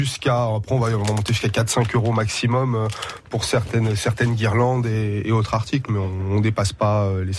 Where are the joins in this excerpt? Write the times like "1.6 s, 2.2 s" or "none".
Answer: none